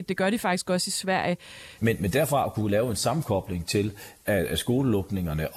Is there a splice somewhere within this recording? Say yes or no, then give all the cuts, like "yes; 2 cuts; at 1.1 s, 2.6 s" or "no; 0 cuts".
yes; 1 cut; at 1.8 s